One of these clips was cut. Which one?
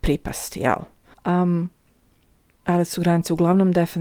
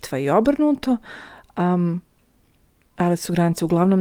first; 1 cut; at 1.1 s

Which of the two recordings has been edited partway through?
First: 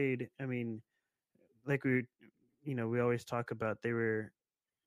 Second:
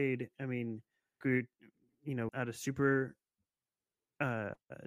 second; 2 cuts; at 1.2 s, 2.3 s

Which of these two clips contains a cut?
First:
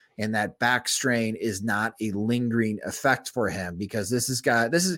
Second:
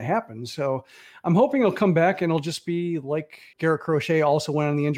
second; 1 cut; at 3.5 s

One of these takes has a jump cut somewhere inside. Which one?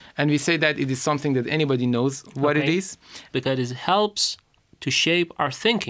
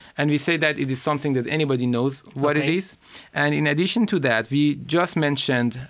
first; 1 cut; at 3.3 s

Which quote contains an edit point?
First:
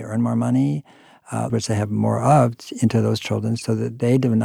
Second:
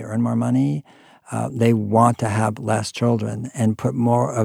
first; 1 cut; at 1.5 s

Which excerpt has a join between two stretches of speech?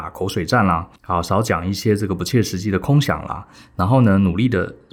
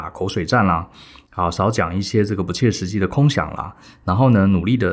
first; 1 cut; at 1.0 s

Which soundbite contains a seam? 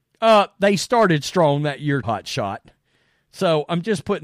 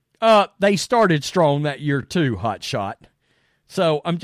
first; 1 cut; at 2.0 s

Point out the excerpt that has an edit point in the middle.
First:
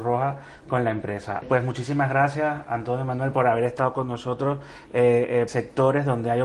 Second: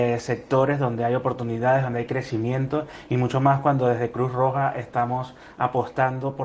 first; 2 cuts; at 1.4 s, 5.5 s

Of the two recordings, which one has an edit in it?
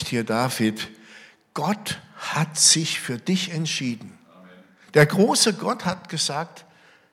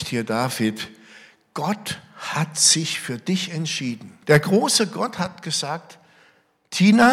second; 1 cut; at 4.2 s

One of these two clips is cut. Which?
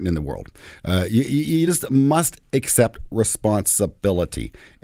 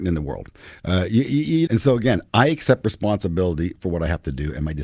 second; 1 cut; at 1.7 s

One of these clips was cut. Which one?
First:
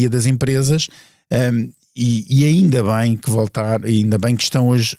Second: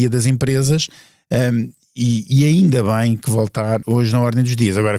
second; 1 cut; at 3.8 s

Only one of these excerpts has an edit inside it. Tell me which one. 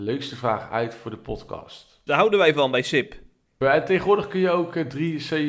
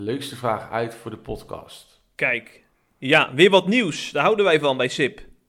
first; 2 cuts; at 2.1 s, 3.6 s

